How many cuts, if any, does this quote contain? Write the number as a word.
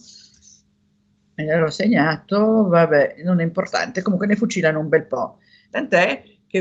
one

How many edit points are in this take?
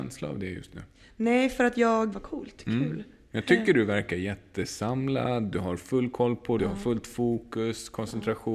two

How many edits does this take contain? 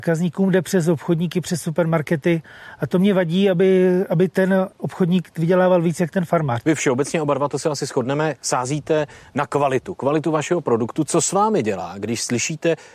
one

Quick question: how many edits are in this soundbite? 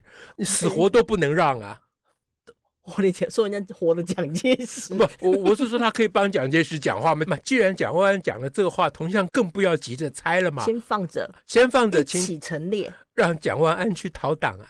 two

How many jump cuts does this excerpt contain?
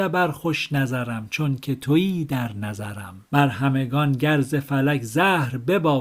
one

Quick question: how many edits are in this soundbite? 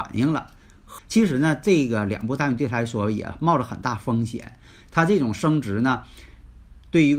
one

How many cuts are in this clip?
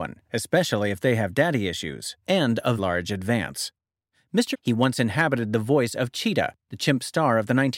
two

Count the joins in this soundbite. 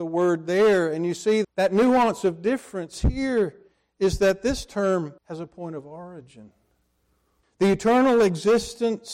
three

